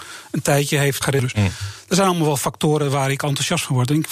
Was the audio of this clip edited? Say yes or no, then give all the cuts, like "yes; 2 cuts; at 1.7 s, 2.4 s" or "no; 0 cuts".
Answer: yes; 1 cut; at 1.0 s